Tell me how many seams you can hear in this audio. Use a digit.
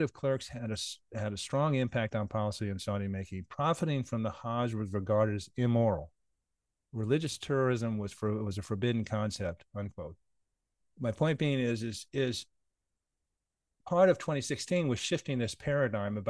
0